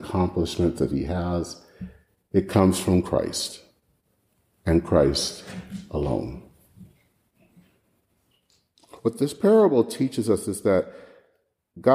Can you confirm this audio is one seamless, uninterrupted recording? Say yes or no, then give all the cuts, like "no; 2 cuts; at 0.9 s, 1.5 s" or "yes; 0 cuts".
yes; 0 cuts